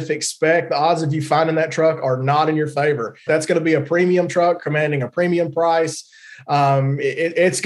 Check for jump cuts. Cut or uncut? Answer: cut